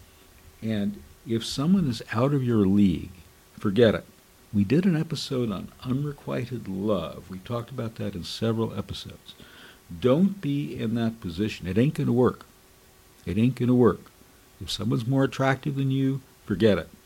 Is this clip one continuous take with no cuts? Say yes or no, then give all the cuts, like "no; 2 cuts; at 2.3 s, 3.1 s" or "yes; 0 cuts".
yes; 0 cuts